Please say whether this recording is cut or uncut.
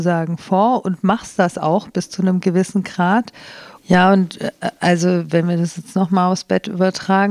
cut